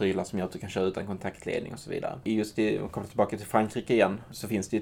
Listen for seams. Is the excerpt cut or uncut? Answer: uncut